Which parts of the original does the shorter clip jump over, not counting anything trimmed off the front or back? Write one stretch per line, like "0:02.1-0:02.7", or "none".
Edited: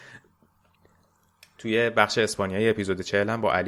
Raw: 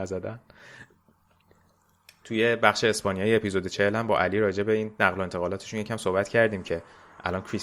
none